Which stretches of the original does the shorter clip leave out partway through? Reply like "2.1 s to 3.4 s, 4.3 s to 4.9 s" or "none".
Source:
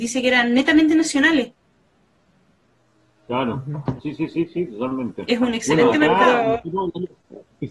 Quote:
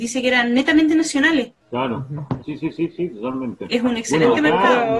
1.6 s to 3.2 s